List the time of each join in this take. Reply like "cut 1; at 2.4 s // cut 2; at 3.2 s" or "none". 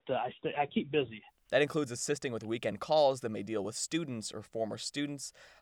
none